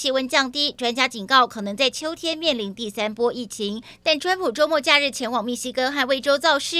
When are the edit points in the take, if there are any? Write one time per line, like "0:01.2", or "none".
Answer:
0:04.0